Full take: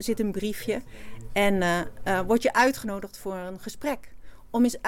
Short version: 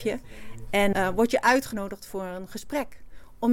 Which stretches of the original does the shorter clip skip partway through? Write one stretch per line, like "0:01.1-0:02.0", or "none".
0:01.6-0:02.0